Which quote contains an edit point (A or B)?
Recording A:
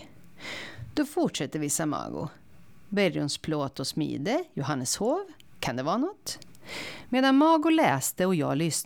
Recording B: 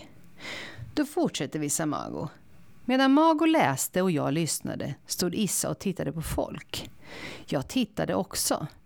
B